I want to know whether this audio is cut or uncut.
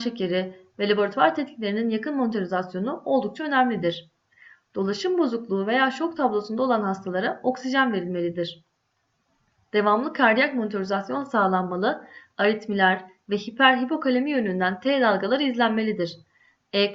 cut